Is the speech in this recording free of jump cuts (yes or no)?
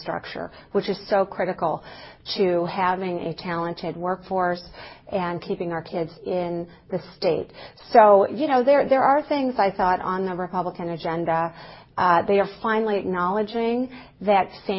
yes